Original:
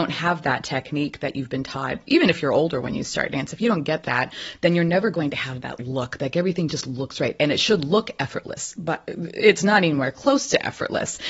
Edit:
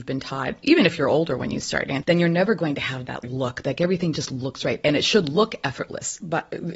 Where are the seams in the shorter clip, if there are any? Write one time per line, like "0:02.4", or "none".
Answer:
0:02.0